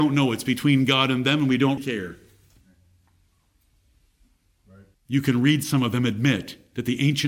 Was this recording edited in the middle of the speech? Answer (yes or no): yes